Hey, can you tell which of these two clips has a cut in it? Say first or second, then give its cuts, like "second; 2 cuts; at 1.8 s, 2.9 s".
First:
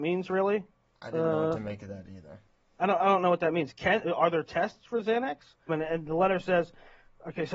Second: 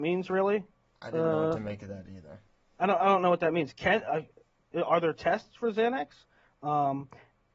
first; 2 cuts; at 4.0 s, 5.7 s